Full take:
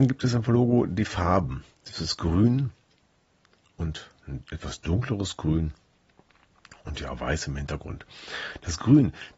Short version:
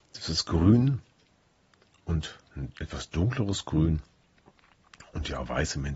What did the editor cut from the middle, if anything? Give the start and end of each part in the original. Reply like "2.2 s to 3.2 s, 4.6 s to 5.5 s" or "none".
none